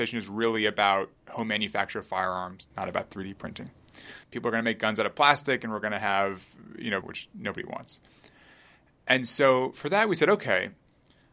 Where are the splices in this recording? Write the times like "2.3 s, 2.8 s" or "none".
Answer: 4.2 s, 7.0 s